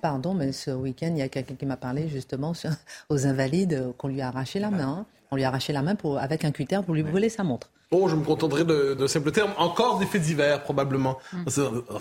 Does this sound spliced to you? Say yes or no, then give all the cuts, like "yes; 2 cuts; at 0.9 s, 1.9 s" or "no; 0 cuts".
yes; 1 cut; at 9.0 s